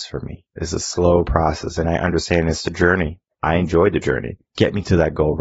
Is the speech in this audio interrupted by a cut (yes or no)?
yes